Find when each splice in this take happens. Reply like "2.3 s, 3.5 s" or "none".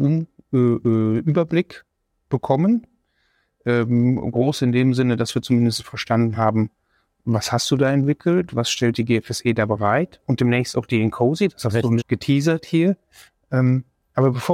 12.0 s